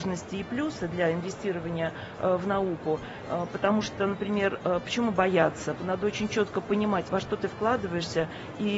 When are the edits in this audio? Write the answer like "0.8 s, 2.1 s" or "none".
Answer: 5.8 s, 7.0 s